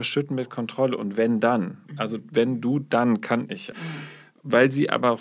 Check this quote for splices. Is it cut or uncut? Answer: cut